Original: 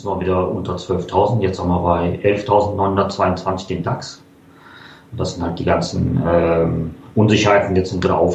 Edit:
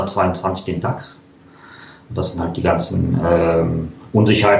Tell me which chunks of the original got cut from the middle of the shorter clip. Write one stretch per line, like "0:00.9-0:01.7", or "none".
none